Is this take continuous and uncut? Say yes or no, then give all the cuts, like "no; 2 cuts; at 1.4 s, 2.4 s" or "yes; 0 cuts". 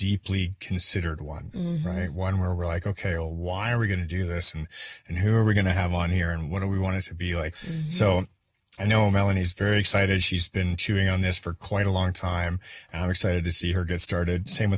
no; 1 cut; at 7.5 s